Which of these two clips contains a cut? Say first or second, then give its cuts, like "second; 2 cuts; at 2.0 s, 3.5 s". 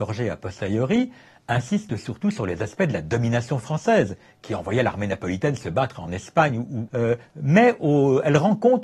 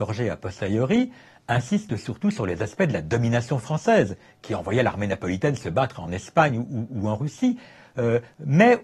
first; 1 cut; at 6.9 s